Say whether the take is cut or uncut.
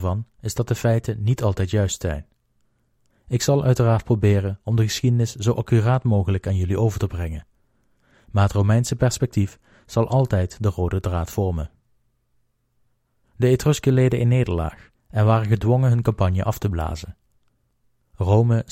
cut